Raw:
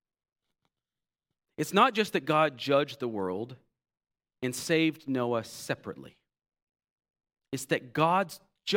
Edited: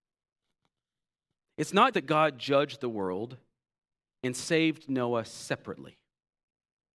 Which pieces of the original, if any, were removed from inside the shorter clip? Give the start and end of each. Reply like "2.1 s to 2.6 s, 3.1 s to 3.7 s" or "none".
1.9 s to 2.1 s